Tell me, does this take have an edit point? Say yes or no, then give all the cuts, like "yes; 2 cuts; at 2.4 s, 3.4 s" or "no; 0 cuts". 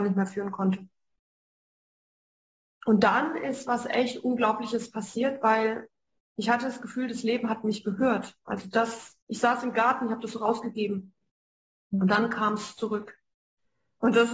no; 0 cuts